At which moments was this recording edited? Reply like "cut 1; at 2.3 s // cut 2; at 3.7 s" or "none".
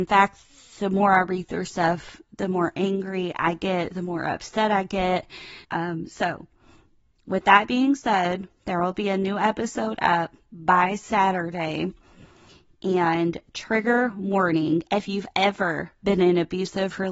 cut 1; at 5.6 s